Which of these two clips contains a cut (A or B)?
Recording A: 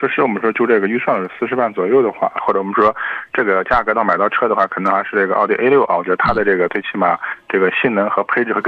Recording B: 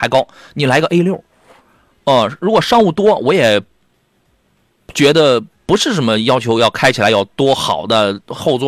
A